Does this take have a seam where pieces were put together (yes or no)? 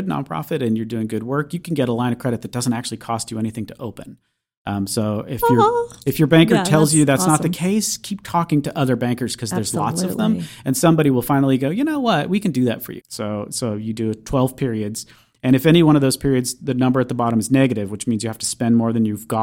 yes